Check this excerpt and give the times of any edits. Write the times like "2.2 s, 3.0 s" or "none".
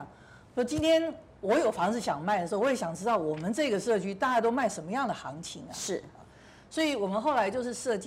none